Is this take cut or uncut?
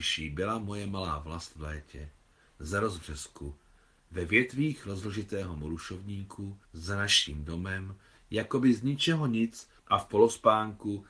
cut